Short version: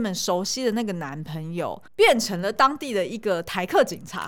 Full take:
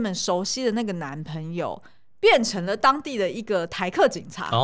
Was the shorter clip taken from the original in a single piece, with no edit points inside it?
no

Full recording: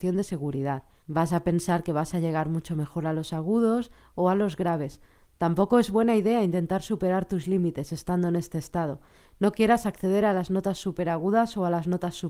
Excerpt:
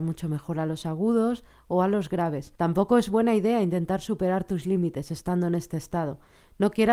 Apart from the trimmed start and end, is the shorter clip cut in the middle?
yes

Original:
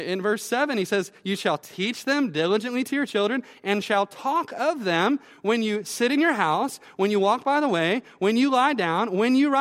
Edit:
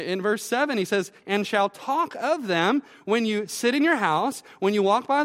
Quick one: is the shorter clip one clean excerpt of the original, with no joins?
no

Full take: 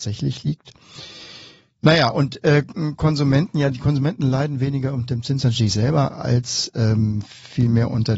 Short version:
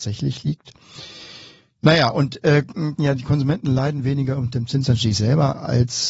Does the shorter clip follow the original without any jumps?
no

